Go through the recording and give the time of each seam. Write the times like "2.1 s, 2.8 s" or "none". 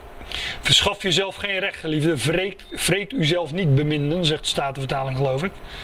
none